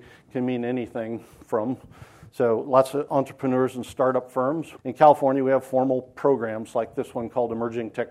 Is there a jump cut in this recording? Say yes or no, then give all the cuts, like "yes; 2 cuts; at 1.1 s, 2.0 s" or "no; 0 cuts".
yes; 1 cut; at 4.8 s